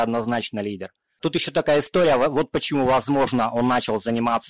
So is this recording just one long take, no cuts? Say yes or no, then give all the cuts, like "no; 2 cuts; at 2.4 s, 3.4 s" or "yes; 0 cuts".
no; 1 cut; at 1.2 s